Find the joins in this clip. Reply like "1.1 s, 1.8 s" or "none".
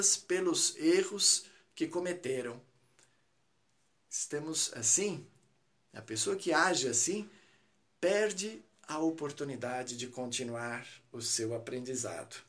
none